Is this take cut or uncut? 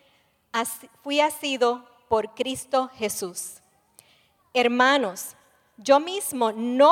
uncut